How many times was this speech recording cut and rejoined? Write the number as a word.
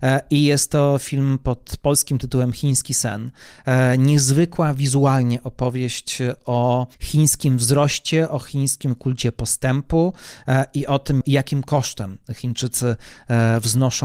two